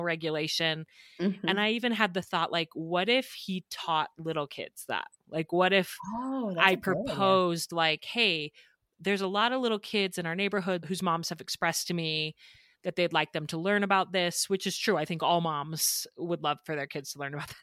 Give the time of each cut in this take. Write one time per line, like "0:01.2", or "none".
none